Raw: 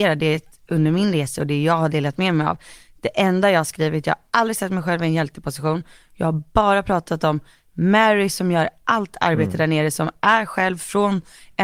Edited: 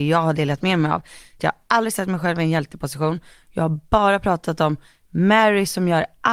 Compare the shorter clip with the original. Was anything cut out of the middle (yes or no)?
yes